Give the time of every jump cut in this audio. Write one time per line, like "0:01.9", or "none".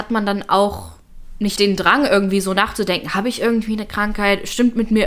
0:01.6